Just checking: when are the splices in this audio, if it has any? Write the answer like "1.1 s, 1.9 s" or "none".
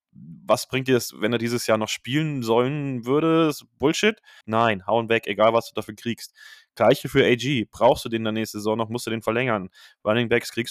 4.4 s